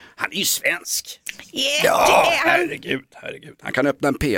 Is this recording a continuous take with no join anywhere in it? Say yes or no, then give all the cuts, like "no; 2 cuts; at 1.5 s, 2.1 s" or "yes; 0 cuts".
yes; 0 cuts